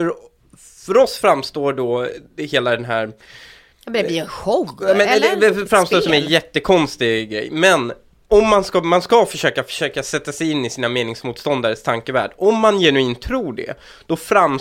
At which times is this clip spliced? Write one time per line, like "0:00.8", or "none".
none

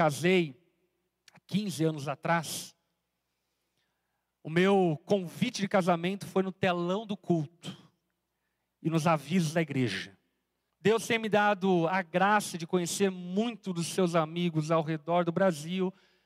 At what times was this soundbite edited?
0:10.7

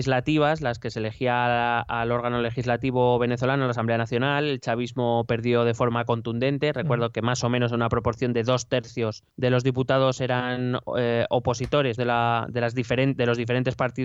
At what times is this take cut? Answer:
0:09.3
0:12.0

